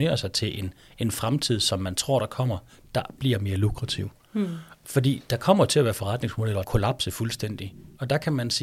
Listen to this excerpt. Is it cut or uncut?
cut